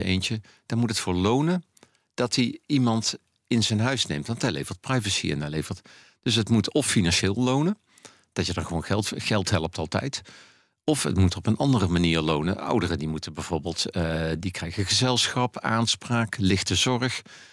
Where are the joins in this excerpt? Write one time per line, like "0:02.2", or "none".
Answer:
none